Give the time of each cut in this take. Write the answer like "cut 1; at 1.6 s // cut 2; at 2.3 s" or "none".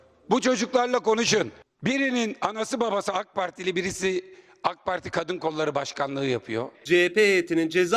cut 1; at 6.7 s